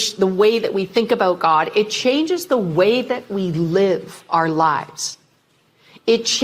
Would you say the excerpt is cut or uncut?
uncut